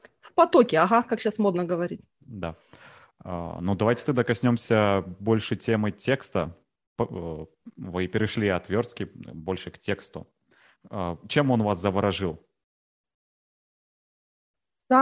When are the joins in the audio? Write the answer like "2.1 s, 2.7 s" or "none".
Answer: none